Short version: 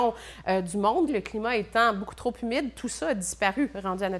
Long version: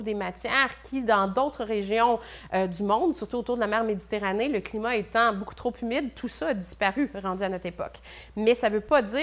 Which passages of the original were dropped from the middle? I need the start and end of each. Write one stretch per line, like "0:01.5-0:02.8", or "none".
0:03.1-0:04.5